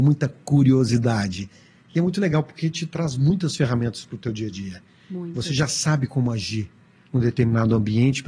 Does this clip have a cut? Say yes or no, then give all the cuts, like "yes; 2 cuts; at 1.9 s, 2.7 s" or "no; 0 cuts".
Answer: no; 0 cuts